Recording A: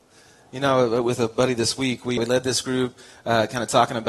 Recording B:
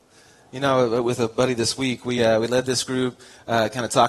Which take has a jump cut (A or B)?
A